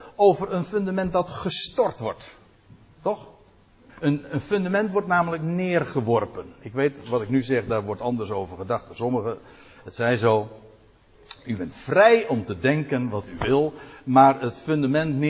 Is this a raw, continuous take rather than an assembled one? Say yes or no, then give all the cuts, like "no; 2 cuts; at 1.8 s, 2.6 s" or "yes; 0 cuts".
no; 1 cut; at 3.9 s